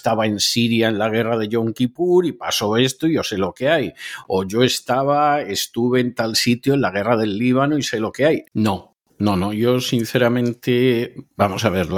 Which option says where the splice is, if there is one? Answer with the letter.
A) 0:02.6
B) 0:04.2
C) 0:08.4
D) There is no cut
C